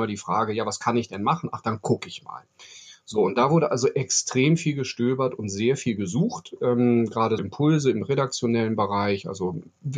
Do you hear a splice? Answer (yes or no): yes